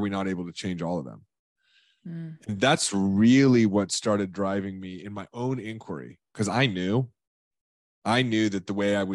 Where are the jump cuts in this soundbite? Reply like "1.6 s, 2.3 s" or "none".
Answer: none